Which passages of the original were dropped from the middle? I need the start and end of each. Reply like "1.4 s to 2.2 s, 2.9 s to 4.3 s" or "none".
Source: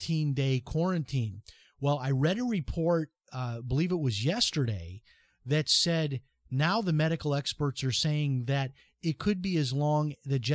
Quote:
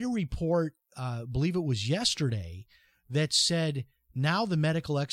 none